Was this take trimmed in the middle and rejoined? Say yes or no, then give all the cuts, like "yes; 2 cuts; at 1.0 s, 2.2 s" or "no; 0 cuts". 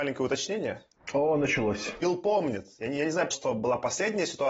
yes; 1 cut; at 3.3 s